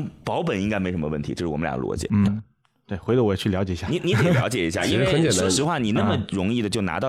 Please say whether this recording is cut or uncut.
cut